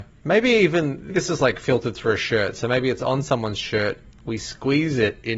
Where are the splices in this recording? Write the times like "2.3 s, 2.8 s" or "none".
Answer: 1.1 s